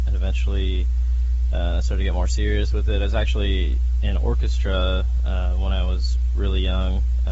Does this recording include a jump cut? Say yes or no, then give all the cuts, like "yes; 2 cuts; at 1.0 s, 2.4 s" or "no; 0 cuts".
no; 0 cuts